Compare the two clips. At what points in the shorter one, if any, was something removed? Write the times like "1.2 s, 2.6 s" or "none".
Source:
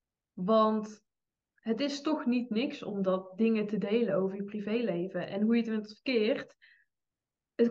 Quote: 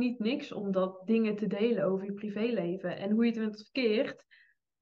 none